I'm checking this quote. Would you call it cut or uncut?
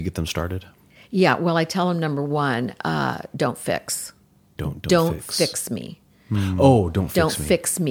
cut